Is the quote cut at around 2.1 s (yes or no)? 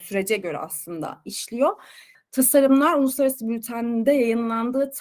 yes